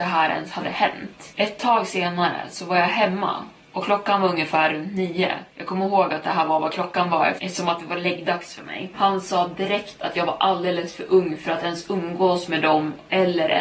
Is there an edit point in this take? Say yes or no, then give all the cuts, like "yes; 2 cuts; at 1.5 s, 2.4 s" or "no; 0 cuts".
yes; 2 cuts; at 5.5 s, 8.9 s